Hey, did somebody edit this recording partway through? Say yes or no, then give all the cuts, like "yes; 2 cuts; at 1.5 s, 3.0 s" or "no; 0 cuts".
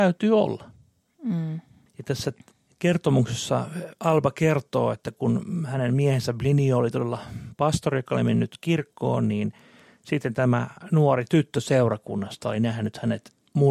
yes; 1 cut; at 1.9 s